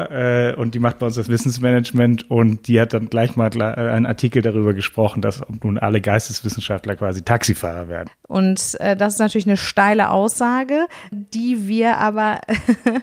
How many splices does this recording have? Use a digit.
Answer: 2